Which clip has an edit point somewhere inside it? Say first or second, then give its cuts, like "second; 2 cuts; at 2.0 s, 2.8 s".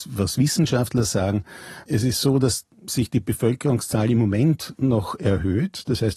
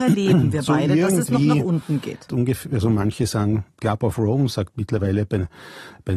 second; 1 cut; at 2.3 s